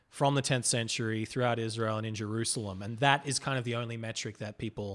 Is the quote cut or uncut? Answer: uncut